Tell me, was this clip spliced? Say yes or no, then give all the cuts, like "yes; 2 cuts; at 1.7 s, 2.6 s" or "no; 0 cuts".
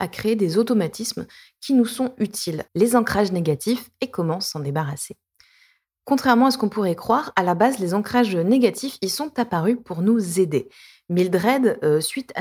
yes; 1 cut; at 2.7 s